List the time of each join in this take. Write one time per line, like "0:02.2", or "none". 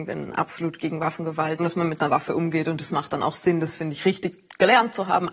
0:01.6